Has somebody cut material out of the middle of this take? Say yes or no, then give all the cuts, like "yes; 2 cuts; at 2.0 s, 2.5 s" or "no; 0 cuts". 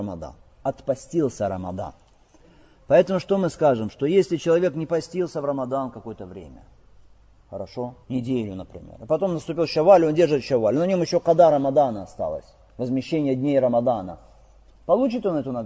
yes; 1 cut; at 8.0 s